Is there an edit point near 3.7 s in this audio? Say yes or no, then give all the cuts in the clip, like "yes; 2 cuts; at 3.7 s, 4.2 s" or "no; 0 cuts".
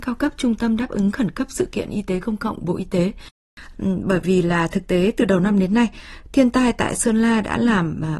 yes; 1 cut; at 3.7 s